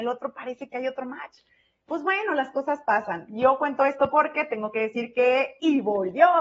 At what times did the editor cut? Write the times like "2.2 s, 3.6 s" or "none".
none